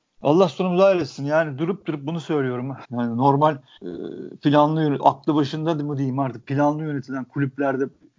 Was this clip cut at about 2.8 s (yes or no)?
yes